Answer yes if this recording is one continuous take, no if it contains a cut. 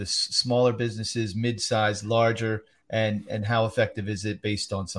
yes